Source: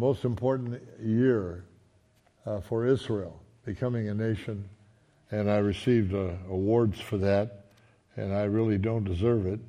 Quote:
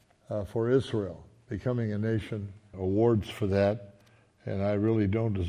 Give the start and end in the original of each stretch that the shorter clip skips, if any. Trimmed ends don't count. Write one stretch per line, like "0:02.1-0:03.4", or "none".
0:04.9-0:06.4